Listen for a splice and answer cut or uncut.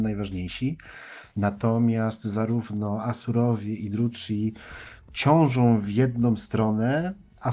cut